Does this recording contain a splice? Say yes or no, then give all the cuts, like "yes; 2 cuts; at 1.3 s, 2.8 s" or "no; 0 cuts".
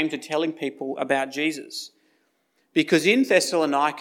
no; 0 cuts